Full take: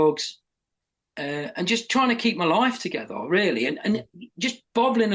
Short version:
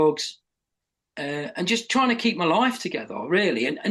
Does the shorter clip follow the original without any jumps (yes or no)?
yes